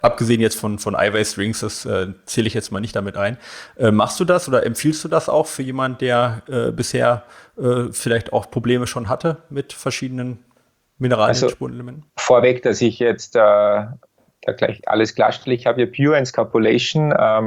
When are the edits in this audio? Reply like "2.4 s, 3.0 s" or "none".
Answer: 12.1 s